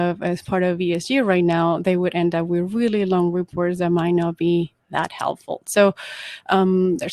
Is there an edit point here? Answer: no; 0 cuts

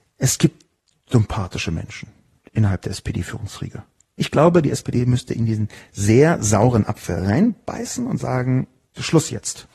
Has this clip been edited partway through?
yes; 1 cut; at 4.2 s

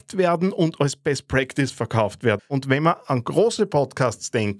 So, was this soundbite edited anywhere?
yes; 1 cut; at 2.4 s

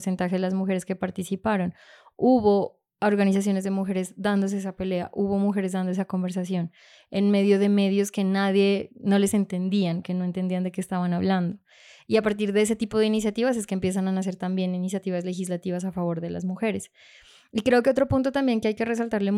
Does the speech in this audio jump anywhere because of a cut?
no; 0 cuts

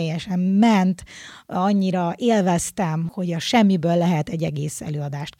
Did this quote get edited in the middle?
no; 0 cuts

